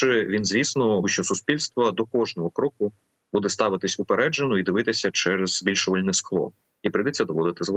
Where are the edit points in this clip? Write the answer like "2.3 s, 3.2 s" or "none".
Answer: 1.0 s